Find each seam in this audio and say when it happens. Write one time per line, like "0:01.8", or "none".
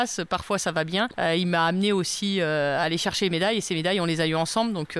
0:01.1

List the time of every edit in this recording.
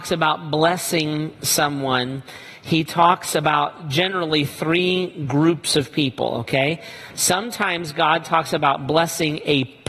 none

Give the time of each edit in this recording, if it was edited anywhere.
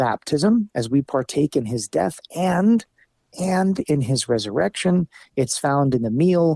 none

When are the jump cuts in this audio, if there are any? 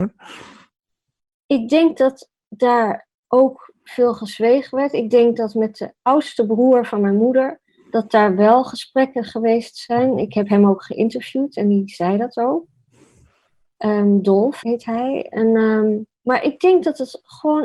0:14.6
0:16.1

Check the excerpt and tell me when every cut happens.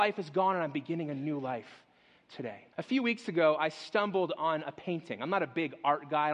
0:02.7

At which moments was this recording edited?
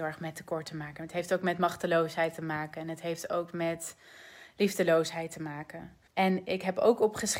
0:06.1

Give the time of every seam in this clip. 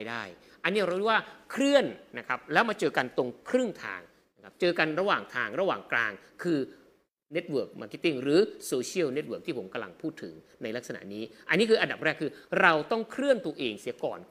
none

